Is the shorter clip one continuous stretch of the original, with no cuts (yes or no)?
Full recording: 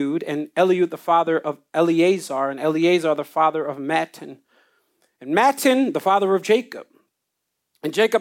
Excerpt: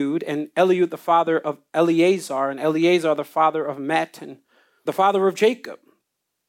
no